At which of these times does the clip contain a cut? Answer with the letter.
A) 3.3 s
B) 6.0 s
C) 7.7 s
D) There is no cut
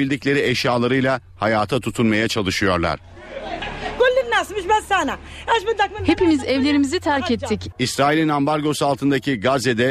C